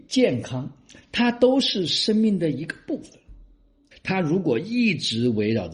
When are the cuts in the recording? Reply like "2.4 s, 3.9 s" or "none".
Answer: 3.9 s